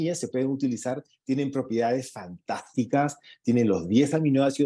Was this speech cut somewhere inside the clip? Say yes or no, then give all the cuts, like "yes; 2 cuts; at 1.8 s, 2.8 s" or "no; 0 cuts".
no; 0 cuts